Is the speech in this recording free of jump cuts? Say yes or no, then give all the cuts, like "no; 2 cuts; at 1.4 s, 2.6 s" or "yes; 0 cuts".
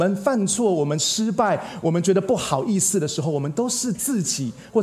yes; 0 cuts